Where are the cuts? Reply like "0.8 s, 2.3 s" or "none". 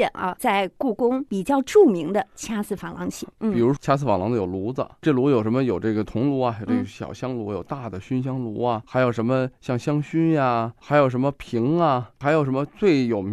none